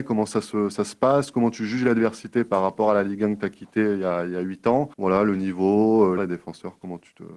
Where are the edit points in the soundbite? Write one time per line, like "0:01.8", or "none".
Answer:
0:04.9
0:06.2